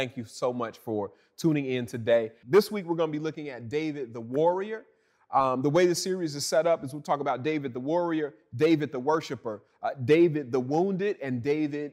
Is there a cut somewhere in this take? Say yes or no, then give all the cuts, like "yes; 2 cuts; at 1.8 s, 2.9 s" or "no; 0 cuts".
yes; 1 cut; at 2.4 s